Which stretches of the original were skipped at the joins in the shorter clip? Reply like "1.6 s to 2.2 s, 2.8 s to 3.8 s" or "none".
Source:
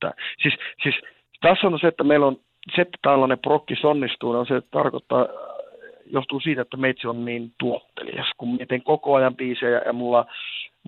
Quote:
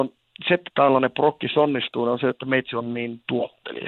4.6 s to 6.6 s